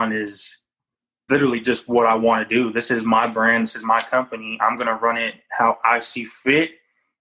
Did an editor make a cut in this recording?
yes; 1 cut; at 1.3 s

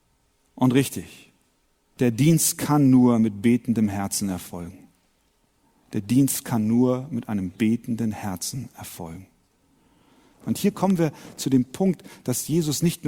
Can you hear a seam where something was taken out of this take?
yes; 1 cut; at 10.3 s

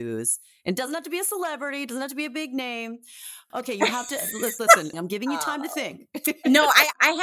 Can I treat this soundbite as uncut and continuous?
no; 2 cuts; at 3.5 s, 4.9 s

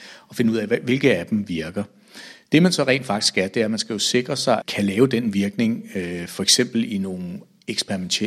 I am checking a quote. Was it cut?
yes; 1 cut; at 4.6 s

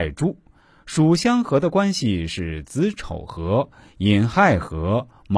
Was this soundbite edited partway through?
yes; 1 cut; at 1.2 s

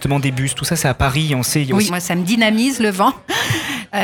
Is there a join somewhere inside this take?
yes; 1 cut; at 1.9 s

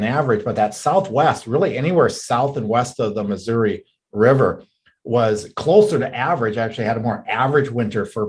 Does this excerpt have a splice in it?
no; 0 cuts

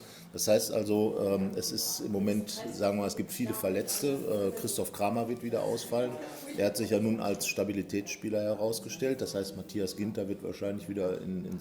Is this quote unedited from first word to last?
yes; 0 cuts

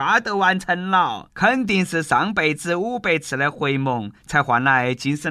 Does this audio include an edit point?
yes; 1 cut; at 1.3 s

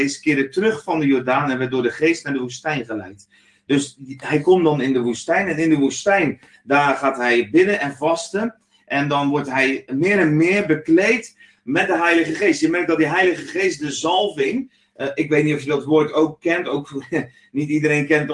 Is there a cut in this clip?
no; 0 cuts

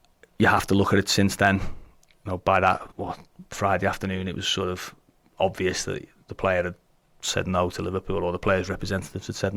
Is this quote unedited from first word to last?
no; 1 cut; at 2.9 s

